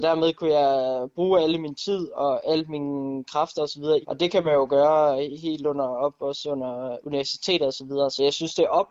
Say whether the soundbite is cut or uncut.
cut